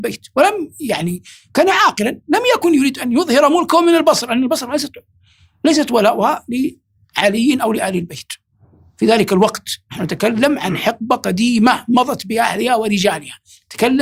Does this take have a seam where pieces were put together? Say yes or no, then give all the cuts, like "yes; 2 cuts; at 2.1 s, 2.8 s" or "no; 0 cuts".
no; 0 cuts